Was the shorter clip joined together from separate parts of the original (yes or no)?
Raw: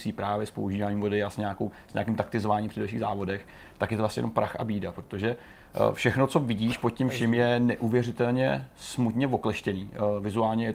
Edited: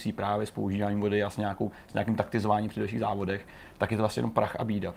no